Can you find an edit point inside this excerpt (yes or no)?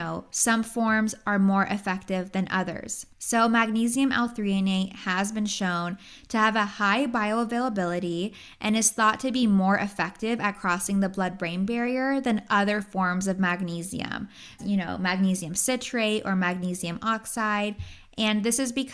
yes